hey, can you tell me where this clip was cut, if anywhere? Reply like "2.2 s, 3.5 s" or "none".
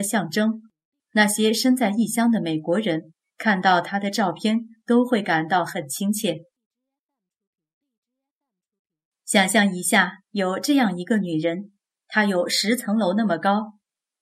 none